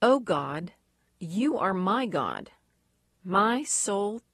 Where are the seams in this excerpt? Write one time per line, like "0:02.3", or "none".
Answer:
0:03.1

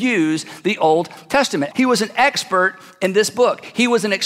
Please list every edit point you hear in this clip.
0:01.7

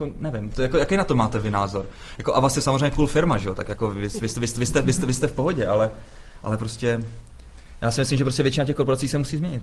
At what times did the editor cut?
none

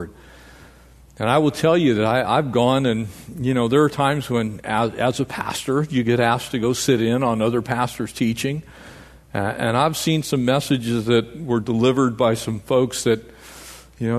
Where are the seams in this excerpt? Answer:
none

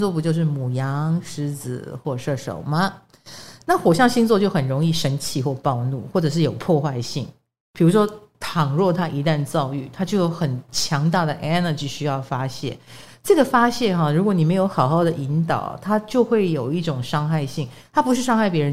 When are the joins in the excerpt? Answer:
none

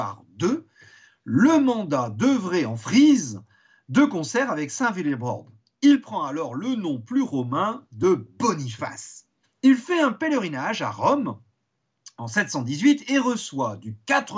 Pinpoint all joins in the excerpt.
0:09.4

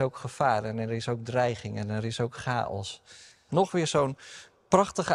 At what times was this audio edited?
0:03.5

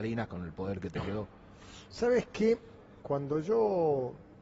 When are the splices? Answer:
0:03.0

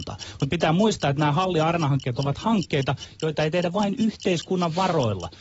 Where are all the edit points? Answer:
none

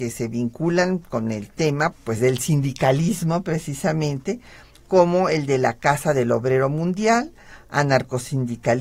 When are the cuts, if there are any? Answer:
0:01.9

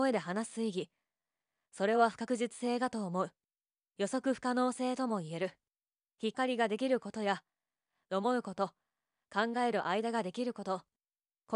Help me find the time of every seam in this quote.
0:06.3

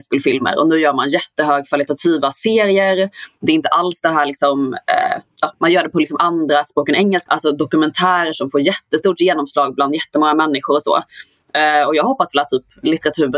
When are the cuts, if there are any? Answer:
0:07.3

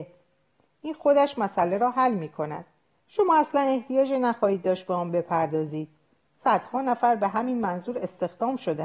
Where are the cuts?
0:03.0

